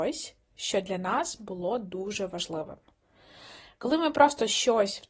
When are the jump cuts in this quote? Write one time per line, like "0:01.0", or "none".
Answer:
none